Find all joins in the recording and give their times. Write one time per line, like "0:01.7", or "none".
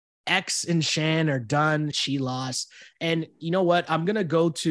0:01.9